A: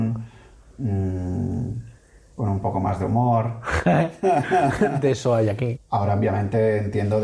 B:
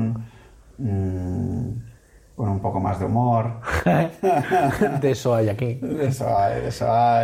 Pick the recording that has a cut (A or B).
A